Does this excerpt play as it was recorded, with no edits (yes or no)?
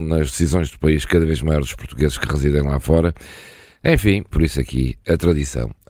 no